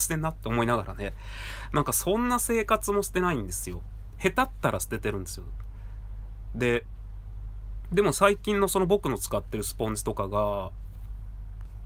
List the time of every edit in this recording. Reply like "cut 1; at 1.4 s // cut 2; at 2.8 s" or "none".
none